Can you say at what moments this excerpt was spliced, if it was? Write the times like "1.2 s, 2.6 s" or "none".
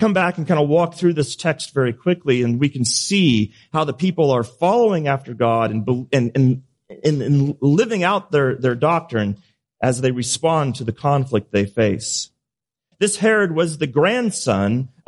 12.9 s